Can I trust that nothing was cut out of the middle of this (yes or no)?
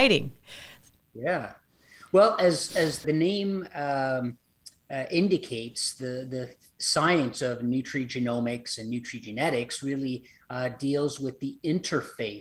no